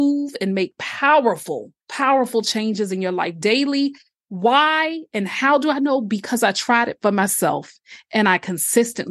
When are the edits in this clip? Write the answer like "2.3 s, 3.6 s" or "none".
1.8 s